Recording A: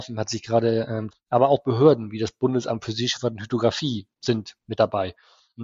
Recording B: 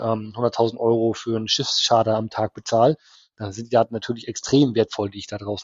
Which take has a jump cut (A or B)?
A